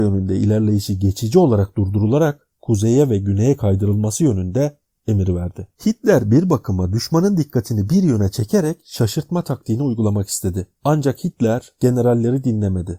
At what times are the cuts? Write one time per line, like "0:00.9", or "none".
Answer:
0:05.8
0:10.8